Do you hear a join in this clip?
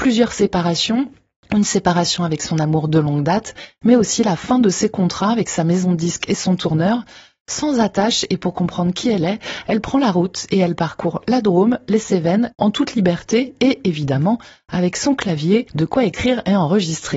yes; 1 cut; at 12.5 s

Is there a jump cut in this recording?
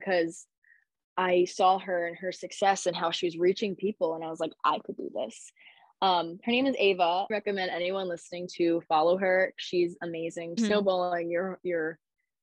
yes; 1 cut; at 10.6 s

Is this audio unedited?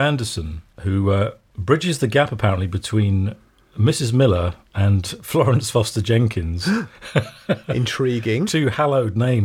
yes; 0 cuts

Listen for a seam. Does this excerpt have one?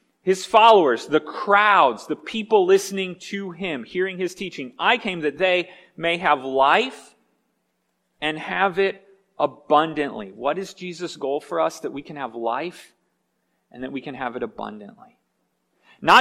no; 0 cuts

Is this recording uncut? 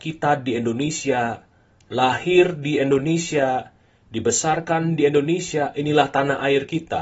yes; 0 cuts

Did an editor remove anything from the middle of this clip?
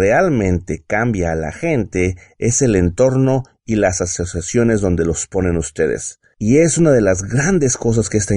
no; 0 cuts

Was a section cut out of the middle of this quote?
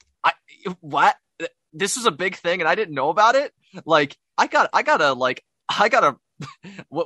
yes; 1 cut; at 4.3 s

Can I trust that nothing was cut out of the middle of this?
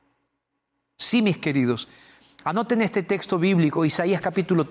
yes; 0 cuts

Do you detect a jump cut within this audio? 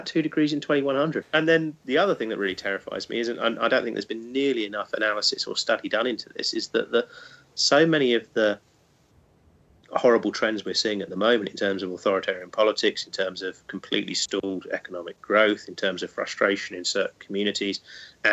yes; 1 cut; at 1.2 s

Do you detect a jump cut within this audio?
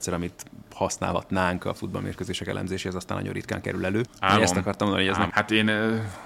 yes; 2 cuts; at 4.1 s, 5.3 s

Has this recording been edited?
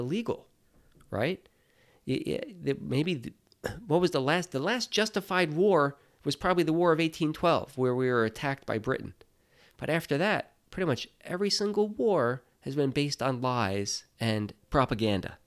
no; 0 cuts

